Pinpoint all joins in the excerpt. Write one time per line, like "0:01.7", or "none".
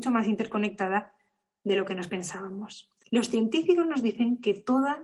0:03.0